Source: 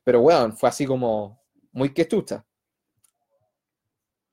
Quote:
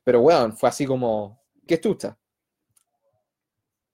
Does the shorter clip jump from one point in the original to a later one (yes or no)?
yes